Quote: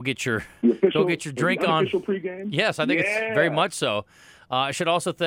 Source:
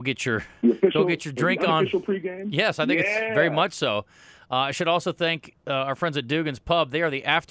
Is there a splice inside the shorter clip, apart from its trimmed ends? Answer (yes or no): no